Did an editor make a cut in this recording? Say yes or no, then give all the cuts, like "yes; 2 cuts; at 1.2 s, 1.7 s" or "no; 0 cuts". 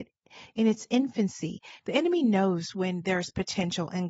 yes; 1 cut; at 1.8 s